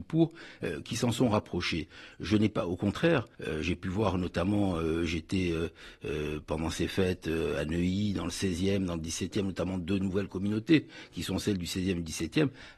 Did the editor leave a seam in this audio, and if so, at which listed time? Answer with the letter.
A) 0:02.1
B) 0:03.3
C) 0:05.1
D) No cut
B